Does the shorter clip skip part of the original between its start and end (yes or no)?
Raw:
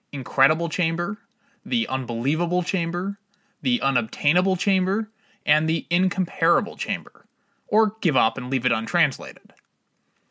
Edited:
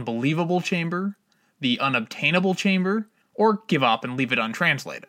yes